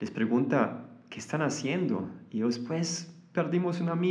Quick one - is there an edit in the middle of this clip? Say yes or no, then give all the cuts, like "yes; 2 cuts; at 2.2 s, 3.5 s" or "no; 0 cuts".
no; 0 cuts